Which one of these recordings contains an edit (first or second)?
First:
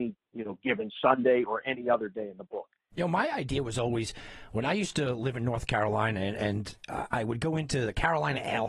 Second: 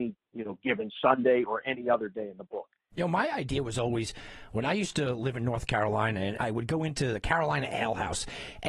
second